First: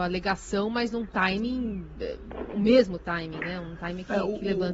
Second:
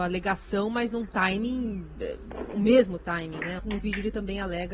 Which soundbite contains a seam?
second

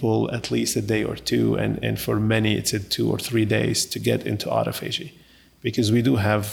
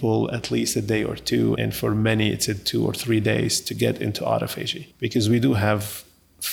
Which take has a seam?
second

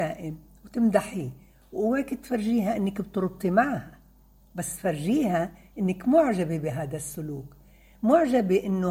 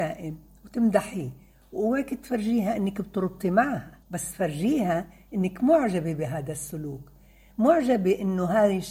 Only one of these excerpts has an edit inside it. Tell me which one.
second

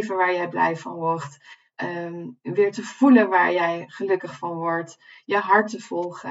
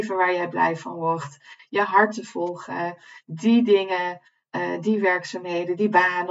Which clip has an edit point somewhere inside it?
second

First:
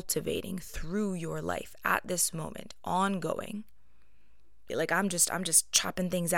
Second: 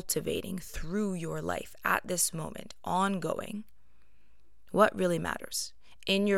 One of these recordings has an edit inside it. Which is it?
first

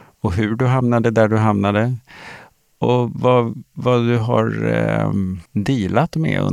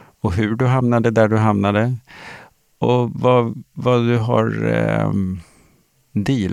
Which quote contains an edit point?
first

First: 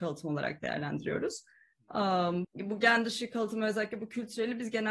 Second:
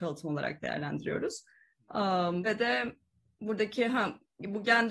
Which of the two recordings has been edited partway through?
first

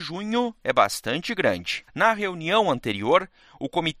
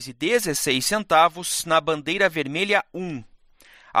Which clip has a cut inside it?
first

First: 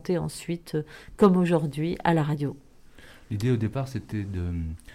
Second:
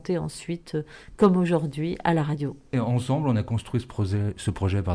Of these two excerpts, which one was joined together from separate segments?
second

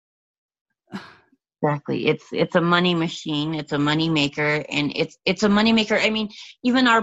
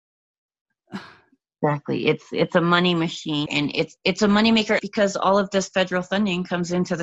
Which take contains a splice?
second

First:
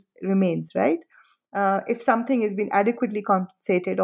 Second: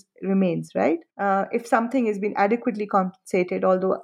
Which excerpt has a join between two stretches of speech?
second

